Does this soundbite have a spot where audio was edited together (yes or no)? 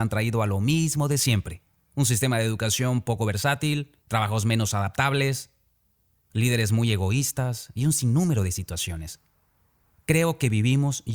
yes